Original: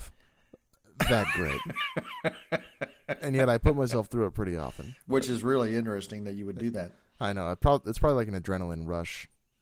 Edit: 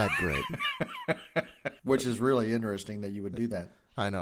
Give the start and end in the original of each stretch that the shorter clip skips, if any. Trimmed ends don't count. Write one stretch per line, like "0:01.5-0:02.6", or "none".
0:03.0-0:05.0